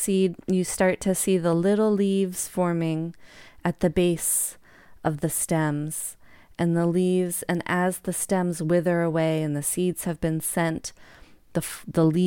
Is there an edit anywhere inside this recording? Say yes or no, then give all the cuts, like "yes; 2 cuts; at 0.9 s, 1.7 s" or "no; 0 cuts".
no; 0 cuts